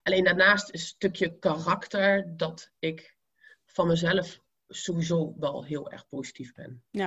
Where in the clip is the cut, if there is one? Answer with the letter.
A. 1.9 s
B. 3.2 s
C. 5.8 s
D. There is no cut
D